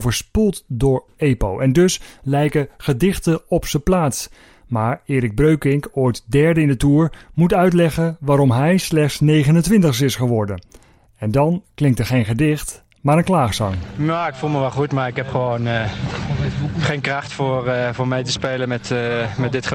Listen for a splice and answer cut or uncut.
uncut